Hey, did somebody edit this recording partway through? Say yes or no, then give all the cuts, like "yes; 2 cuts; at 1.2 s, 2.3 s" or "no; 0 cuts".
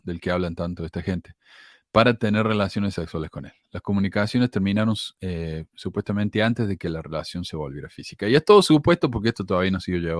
no; 0 cuts